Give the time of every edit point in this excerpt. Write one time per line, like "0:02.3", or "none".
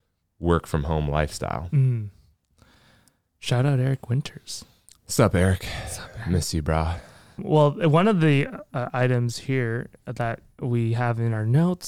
none